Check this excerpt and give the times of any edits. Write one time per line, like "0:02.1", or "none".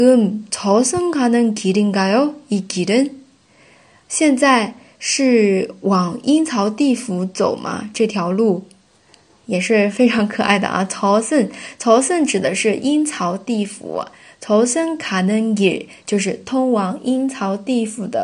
none